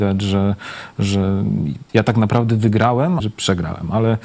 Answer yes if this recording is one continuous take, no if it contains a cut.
no